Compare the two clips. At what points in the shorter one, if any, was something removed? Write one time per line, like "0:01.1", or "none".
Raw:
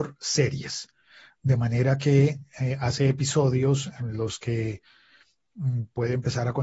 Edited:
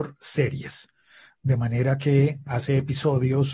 0:02.5